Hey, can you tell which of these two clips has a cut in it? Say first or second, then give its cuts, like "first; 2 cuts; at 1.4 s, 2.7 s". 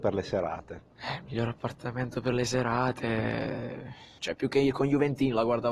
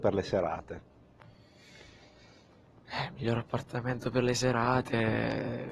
first; 2 cuts; at 0.9 s, 4.2 s